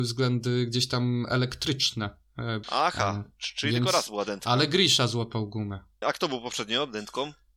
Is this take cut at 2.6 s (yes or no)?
yes